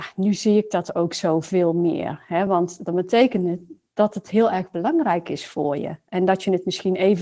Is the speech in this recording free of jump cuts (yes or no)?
yes